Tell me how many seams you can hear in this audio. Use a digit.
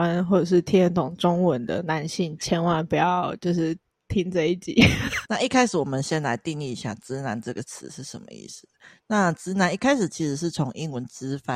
1